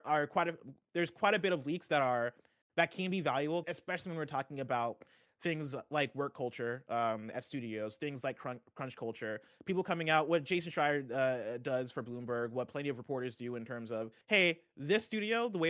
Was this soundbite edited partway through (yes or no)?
yes